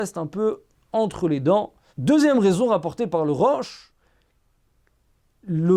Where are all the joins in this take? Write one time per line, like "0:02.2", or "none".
0:01.9